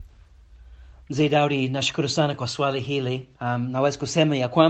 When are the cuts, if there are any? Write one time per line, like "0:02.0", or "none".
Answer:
0:03.3